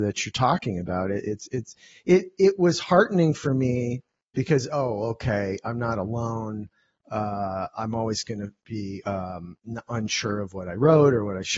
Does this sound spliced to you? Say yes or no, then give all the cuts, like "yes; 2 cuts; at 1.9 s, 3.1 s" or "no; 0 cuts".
no; 0 cuts